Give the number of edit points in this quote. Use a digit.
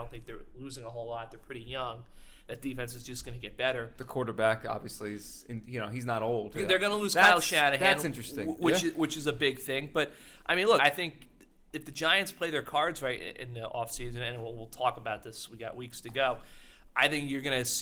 2